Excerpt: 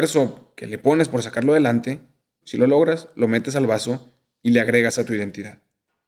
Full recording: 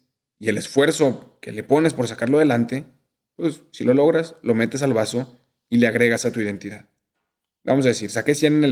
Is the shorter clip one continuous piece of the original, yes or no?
no